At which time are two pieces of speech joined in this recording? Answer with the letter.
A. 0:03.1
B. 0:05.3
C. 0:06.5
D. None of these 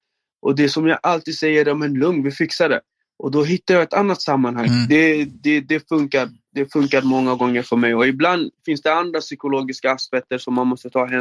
D